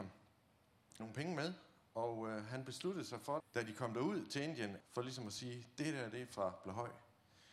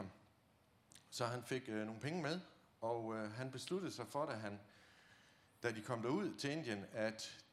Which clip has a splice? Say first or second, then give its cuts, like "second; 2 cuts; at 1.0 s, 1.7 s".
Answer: first; 3 cuts; at 1.0 s, 3.4 s, 4.8 s